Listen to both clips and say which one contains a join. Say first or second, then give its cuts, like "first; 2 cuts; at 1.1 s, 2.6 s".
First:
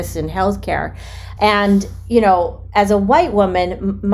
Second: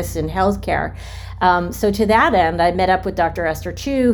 first; 1 cut; at 1.4 s